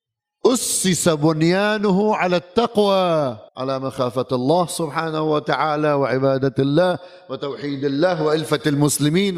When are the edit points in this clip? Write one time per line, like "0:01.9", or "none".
0:03.5